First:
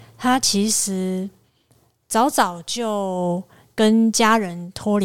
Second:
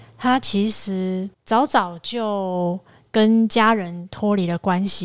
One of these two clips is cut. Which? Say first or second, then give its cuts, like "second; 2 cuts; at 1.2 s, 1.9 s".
second; 1 cut; at 1.3 s